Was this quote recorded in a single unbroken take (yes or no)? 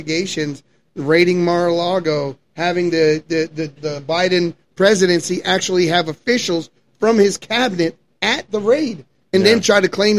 no